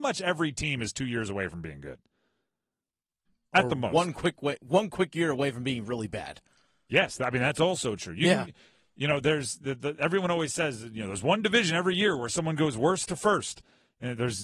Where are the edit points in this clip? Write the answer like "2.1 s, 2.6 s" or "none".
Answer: none